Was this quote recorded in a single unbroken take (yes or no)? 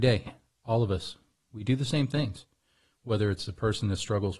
yes